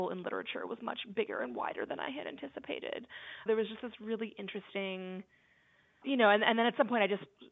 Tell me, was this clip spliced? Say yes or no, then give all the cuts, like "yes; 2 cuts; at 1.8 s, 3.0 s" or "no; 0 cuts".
yes; 2 cuts; at 3.5 s, 6.0 s